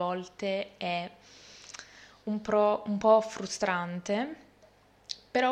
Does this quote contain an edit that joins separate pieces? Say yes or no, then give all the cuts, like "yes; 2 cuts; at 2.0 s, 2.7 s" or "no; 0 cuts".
no; 0 cuts